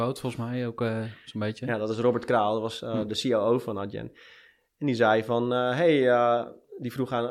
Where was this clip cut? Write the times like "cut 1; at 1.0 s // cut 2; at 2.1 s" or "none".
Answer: none